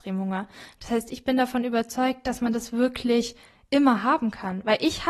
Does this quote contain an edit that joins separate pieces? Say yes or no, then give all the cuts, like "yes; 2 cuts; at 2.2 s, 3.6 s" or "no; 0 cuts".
no; 0 cuts